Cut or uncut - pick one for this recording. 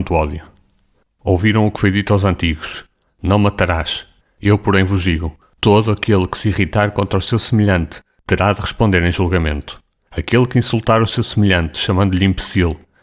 cut